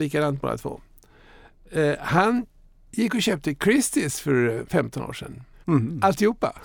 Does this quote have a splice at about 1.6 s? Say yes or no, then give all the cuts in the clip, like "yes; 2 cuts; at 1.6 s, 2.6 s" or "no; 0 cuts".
no; 1 cut; at 5.6 s